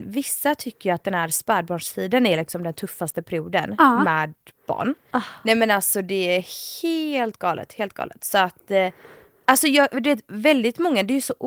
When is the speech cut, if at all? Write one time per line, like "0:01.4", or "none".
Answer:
0:05.1